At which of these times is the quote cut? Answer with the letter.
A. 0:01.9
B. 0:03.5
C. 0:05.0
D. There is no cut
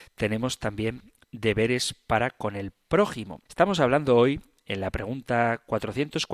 B